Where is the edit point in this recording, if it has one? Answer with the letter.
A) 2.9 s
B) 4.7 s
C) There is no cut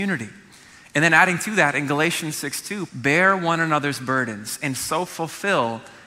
A